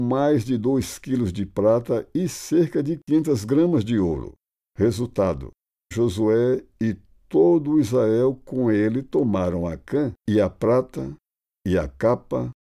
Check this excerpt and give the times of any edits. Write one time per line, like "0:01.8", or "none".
0:05.9
0:10.2